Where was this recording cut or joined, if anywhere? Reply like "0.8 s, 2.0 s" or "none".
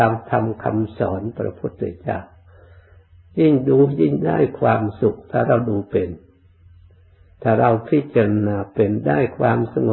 none